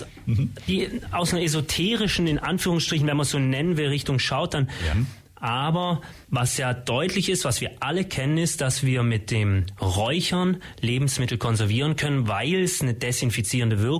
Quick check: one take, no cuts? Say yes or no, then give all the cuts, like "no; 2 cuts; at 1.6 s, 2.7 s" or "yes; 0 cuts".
no; 2 cuts; at 4.9 s, 6.2 s